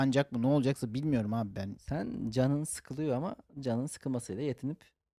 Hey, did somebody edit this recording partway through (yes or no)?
yes